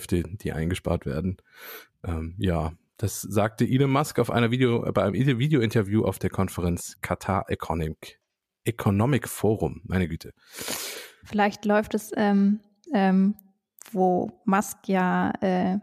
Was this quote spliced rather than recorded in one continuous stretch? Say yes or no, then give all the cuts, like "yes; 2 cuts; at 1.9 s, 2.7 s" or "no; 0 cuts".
yes; 1 cut; at 12.9 s